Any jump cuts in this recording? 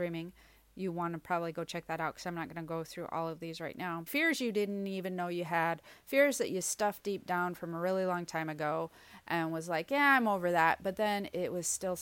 yes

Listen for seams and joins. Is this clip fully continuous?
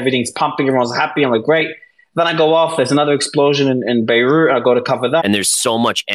no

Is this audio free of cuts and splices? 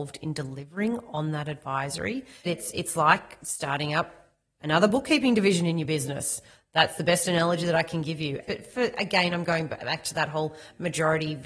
no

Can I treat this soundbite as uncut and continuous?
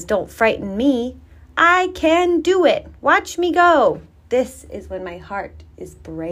yes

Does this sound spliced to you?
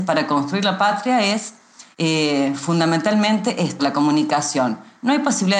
yes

